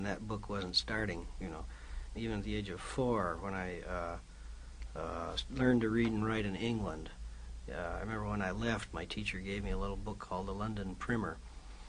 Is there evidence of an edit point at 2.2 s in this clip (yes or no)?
yes